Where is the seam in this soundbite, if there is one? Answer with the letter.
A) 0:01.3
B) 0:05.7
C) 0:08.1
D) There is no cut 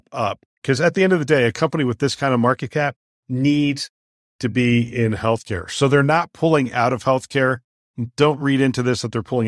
D